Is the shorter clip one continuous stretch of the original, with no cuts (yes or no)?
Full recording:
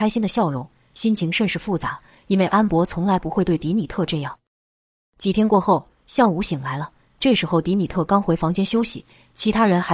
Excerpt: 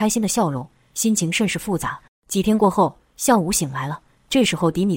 no